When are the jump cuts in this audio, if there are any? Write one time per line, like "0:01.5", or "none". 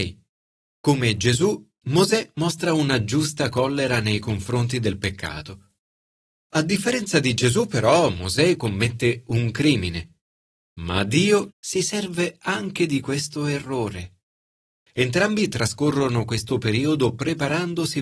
0:11.5
0:14.7